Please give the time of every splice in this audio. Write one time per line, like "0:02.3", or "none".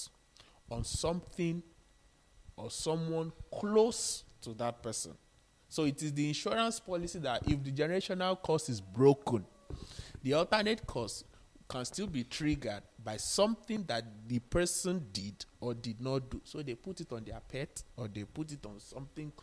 none